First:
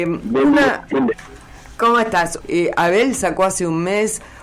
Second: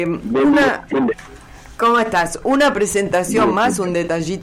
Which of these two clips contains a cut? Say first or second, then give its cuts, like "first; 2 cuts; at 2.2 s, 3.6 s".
first; 1 cut; at 2.4 s